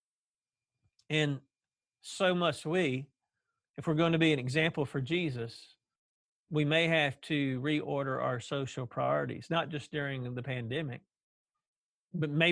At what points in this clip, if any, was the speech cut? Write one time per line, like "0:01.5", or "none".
none

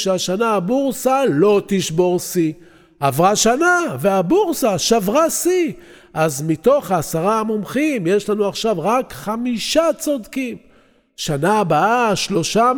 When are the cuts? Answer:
none

